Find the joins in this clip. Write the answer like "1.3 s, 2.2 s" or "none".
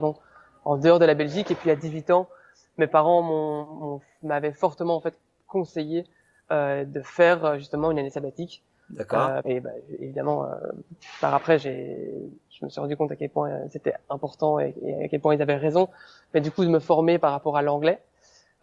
9.4 s